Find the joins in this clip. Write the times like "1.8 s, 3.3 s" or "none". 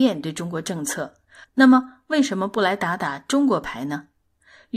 1.4 s

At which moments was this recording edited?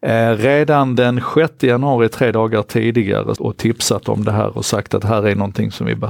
3.4 s

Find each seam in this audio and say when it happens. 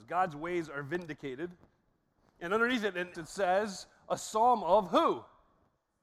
3.1 s

